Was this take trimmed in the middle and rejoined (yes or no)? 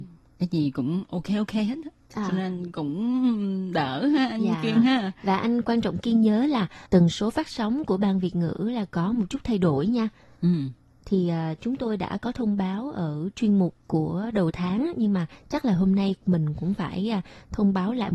no